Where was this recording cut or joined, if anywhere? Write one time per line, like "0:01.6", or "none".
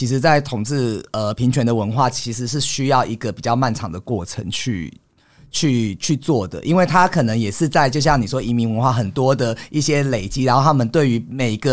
none